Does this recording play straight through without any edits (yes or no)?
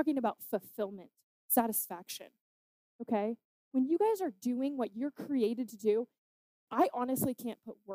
no